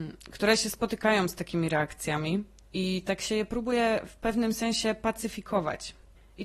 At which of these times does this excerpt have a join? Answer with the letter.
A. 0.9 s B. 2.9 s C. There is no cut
C